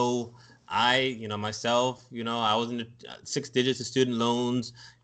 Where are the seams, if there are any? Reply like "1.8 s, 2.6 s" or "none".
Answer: none